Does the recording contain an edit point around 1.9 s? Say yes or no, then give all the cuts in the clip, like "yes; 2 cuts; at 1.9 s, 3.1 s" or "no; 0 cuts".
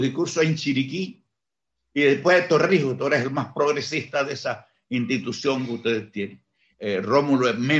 no; 1 cut; at 6.7 s